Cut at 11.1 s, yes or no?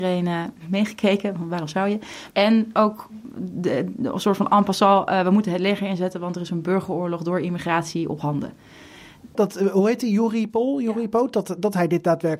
no